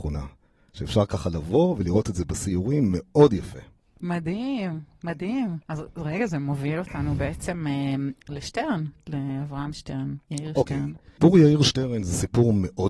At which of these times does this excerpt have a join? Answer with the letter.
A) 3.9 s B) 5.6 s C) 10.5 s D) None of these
B